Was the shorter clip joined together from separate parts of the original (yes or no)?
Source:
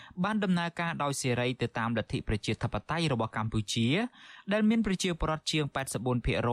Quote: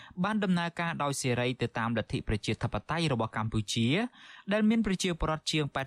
no